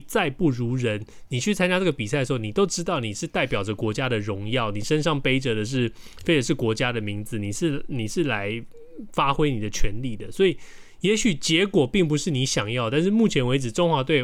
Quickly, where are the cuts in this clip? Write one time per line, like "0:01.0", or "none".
none